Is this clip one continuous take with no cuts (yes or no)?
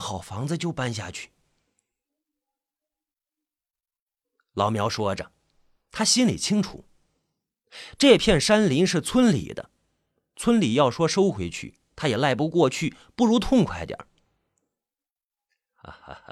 yes